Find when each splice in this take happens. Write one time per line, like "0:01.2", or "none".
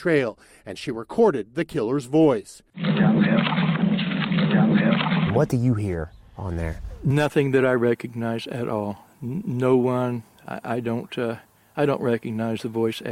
none

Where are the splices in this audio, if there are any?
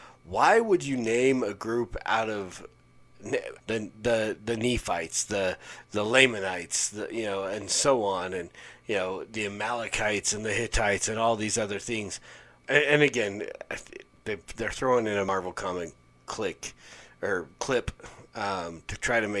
0:03.6
0:12.6

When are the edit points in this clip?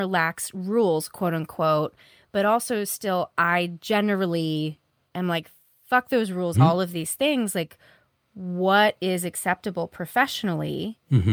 0:06.5

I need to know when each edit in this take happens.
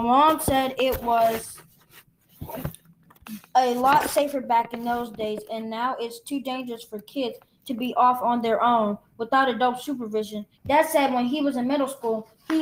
0:10.5

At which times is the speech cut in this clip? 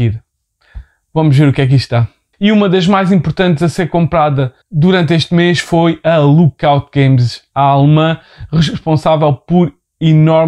0:02.3
0:04.6

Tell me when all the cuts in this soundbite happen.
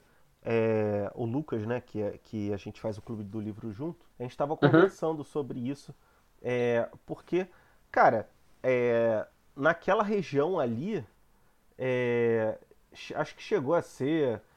0:04.1

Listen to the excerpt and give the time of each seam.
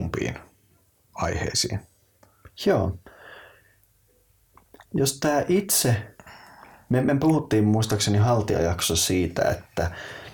none

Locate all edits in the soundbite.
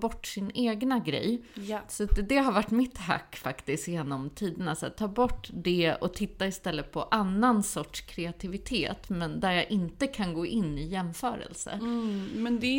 none

